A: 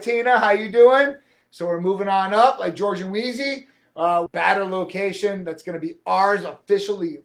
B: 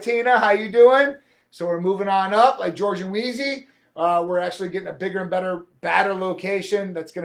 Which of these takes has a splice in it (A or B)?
A